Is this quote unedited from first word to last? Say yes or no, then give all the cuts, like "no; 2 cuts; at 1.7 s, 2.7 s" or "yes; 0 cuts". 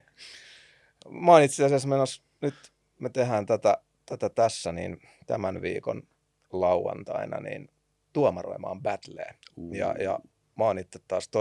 yes; 0 cuts